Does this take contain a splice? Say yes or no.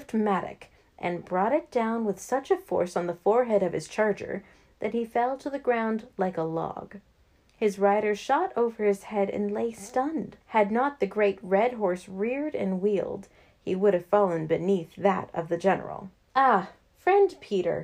yes